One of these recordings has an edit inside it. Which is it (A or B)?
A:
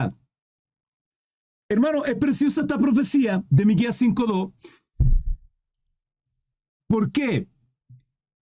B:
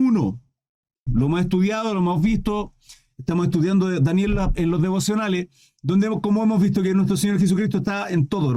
B